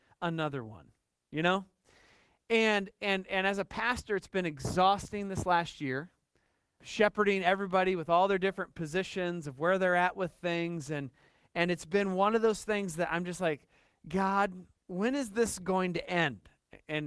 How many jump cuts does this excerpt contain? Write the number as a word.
one